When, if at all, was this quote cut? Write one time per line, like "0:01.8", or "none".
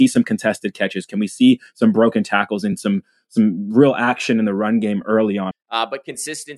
0:05.5